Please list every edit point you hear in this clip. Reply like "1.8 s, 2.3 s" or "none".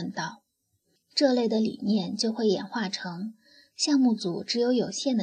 1.0 s